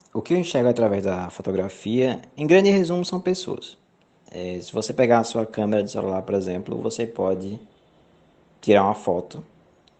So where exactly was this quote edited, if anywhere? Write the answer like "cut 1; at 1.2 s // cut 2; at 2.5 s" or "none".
cut 1; at 4.3 s